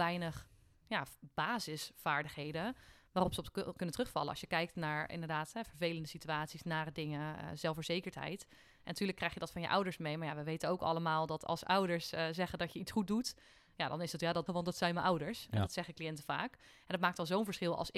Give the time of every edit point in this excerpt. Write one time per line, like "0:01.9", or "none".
0:14.5